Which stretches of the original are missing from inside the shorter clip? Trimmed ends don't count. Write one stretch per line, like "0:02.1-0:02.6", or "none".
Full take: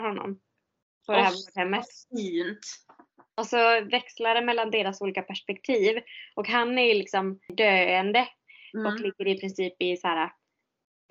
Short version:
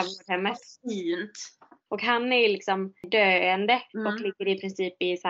0:03.1-0:06.3
0:08.3-0:08.7